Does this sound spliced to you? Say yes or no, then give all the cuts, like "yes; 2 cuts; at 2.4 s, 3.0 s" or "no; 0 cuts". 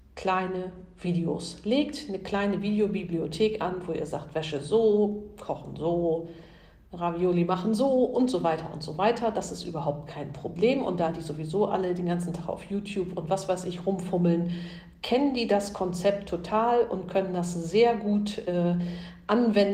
no; 0 cuts